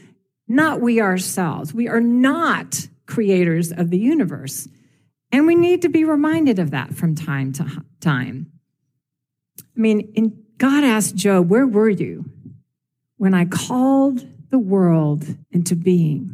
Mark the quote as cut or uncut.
cut